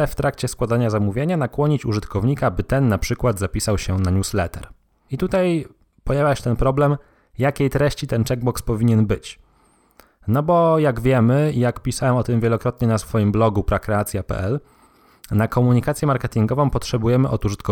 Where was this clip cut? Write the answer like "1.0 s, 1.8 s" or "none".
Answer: none